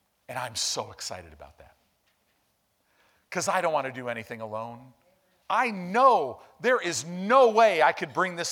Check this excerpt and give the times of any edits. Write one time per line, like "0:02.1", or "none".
0:05.4